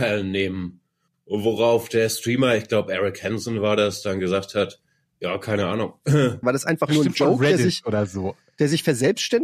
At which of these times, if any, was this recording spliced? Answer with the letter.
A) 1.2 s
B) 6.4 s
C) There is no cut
B